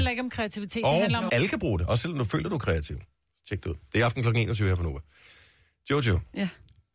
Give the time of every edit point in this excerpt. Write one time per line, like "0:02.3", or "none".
0:01.3